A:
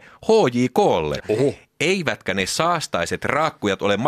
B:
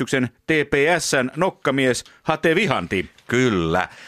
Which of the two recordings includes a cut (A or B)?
A